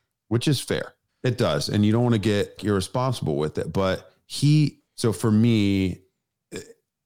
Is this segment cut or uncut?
cut